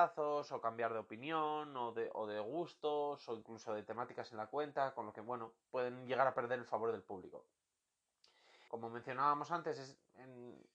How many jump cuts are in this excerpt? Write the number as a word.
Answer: one